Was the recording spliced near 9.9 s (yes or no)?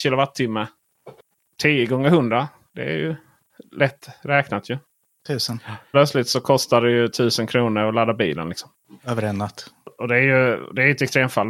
no